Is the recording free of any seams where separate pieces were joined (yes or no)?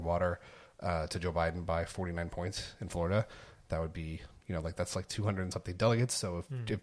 yes